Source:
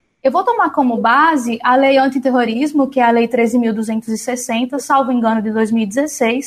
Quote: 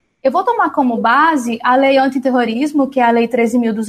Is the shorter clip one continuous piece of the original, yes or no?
yes